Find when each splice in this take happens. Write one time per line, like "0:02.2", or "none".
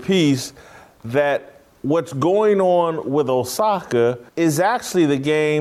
0:04.3